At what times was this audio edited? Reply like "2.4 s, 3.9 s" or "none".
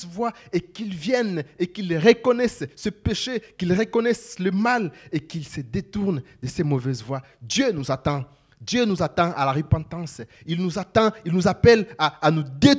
none

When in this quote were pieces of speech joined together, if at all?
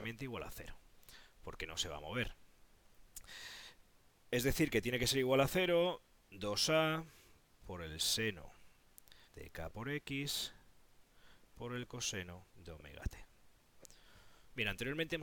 9.2 s, 12.5 s

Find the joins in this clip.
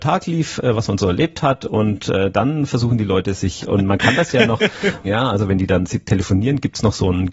3.6 s, 5.0 s

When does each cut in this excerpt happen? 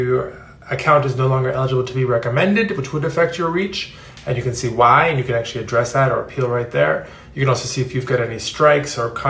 none

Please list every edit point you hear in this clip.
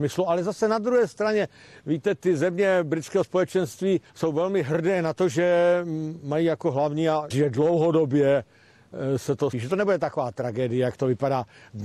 4.1 s, 7.3 s, 9.5 s

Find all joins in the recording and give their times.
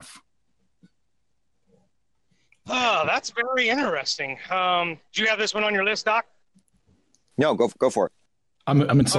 none

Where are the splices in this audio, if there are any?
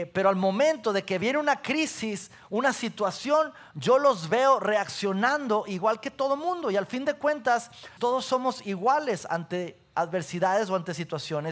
8.0 s

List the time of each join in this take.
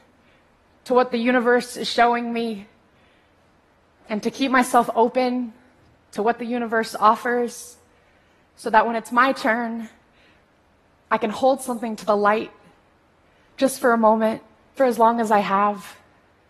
14.8 s

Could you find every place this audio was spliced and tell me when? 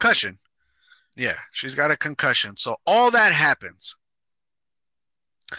1.0 s

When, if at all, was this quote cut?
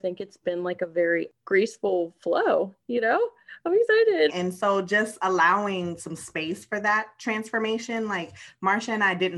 4.3 s

